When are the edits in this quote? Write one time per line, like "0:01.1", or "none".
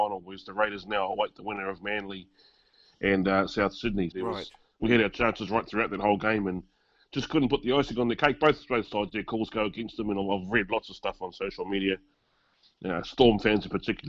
0:04.1